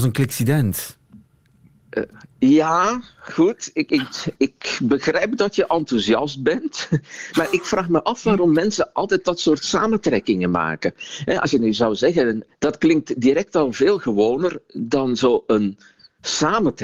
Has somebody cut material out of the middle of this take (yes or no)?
yes